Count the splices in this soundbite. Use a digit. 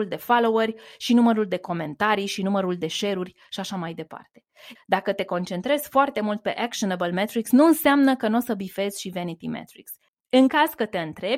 2